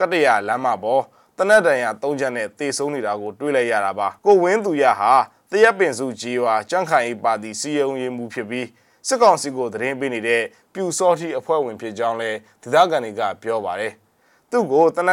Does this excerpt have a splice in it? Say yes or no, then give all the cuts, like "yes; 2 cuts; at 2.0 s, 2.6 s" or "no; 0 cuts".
yes; 1 cut; at 4.2 s